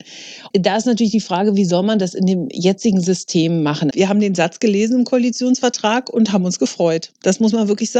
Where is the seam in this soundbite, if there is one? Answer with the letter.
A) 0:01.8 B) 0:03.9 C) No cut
B